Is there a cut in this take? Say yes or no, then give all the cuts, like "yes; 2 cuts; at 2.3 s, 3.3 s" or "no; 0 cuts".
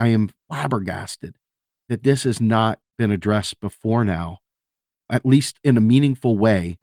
no; 0 cuts